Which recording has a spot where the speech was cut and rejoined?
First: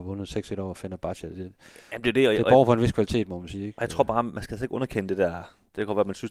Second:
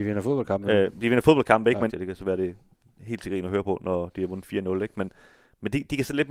second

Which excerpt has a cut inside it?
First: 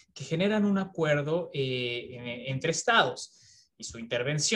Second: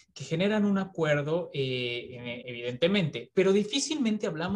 second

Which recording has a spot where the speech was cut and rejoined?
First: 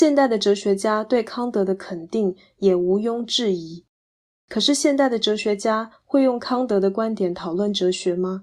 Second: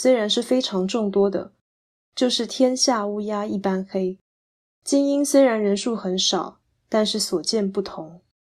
second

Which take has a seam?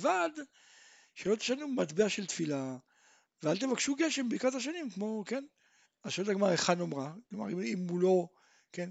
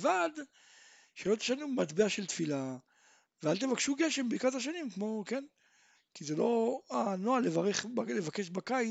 first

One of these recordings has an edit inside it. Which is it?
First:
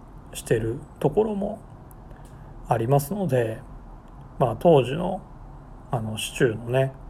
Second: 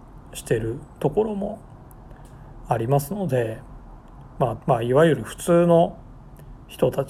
second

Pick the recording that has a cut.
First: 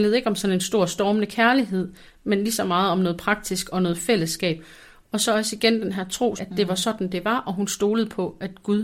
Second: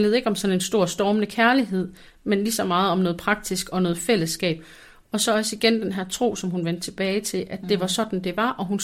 first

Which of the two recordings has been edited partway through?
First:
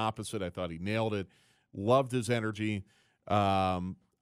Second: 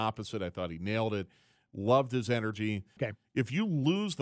second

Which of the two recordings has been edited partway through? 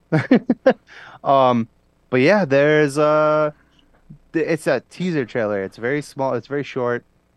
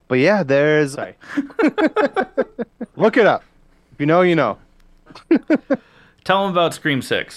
second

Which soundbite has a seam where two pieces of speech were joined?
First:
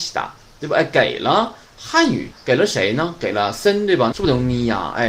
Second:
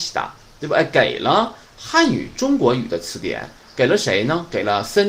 first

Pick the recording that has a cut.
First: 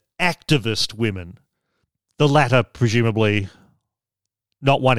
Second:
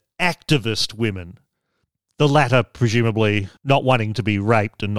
second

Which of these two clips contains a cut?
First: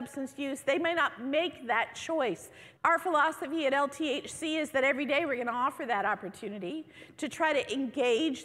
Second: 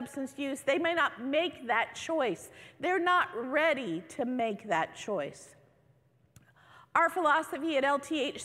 first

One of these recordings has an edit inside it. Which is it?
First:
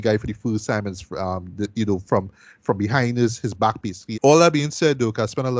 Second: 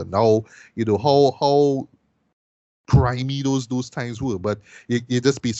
first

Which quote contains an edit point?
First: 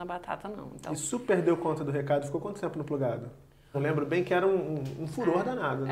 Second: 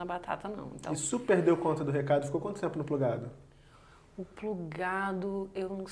first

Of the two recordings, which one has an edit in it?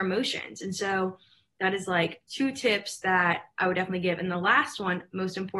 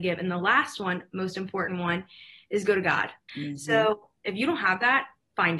second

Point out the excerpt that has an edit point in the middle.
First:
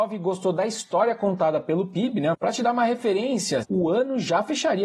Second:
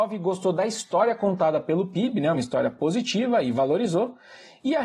first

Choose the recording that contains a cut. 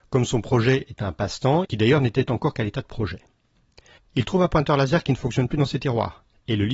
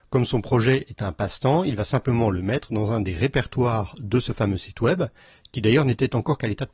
first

